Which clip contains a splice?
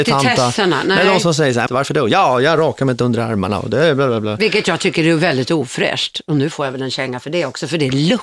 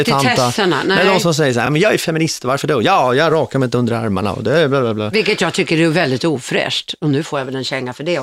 first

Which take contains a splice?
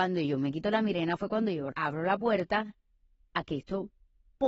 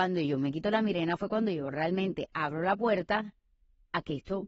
first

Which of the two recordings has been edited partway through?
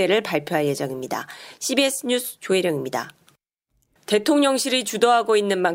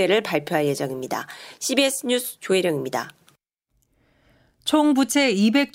first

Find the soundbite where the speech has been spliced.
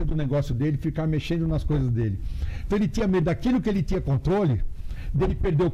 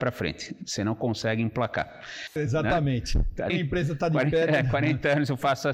second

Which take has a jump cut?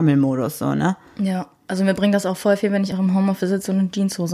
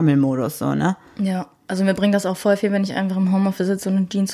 first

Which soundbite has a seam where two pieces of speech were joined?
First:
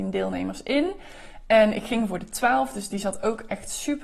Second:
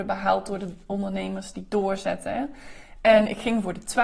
second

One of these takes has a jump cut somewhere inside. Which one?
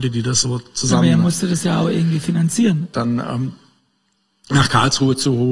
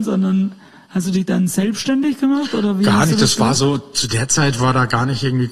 first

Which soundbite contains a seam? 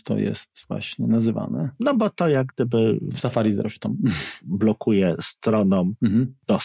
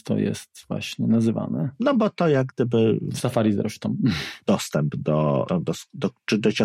second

